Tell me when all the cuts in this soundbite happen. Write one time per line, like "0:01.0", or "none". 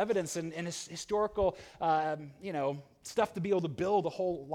none